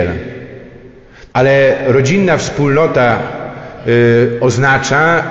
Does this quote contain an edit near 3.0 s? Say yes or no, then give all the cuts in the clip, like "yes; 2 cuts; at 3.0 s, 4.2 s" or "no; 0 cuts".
no; 1 cut; at 1.3 s